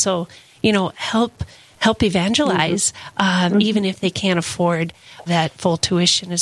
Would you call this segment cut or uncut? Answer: cut